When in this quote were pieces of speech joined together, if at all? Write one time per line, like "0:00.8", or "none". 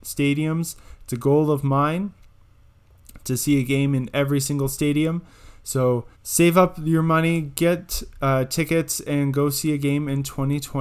0:06.1